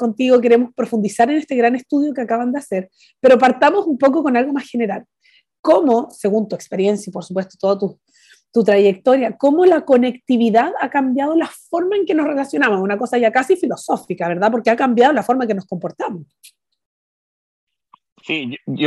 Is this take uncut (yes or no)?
yes